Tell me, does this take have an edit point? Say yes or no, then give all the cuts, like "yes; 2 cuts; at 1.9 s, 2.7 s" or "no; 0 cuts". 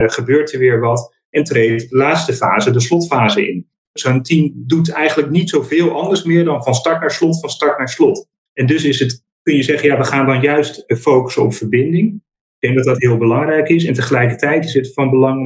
no; 0 cuts